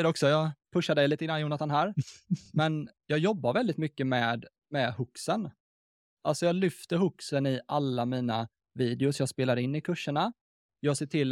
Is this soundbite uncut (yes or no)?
yes